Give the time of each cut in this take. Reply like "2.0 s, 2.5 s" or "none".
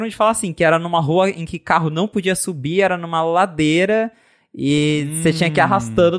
none